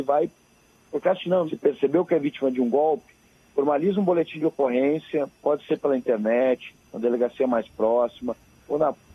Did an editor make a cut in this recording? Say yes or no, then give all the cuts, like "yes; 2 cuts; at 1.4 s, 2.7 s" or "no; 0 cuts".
yes; 1 cut; at 1.5 s